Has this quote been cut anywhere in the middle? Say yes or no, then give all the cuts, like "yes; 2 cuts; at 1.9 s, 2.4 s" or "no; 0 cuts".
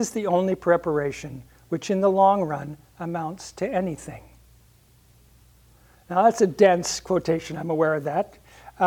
no; 0 cuts